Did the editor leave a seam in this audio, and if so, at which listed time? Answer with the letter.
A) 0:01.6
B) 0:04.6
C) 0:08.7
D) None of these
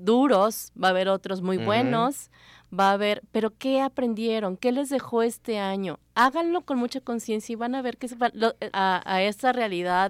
C